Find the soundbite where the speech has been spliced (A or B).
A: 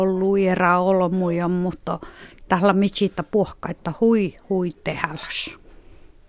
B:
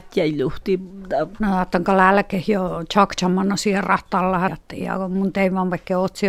B